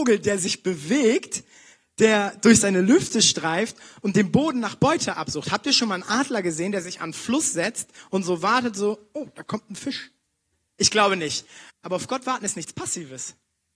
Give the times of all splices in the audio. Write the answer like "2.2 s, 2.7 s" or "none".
11.7 s